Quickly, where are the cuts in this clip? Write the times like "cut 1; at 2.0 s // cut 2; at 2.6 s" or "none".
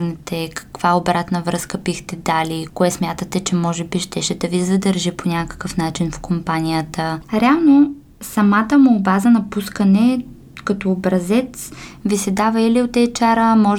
cut 1; at 2.7 s // cut 2; at 7.2 s